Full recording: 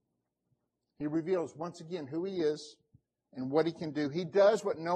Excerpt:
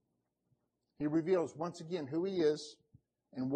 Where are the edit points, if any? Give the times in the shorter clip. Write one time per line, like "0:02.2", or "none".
none